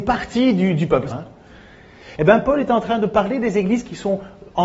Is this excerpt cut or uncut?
cut